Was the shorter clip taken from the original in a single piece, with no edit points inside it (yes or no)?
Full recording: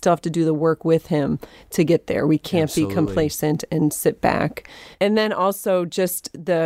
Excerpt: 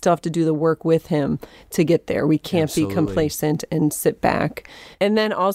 yes